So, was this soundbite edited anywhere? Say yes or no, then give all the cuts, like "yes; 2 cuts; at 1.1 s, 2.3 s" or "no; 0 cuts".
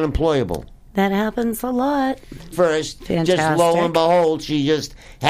yes; 1 cut; at 2.5 s